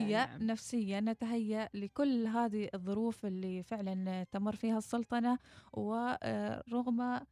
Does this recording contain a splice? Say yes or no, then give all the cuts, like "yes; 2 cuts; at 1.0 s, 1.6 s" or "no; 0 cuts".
no; 0 cuts